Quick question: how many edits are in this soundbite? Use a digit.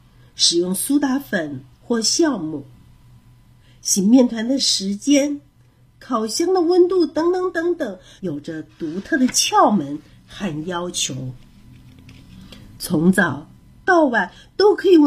1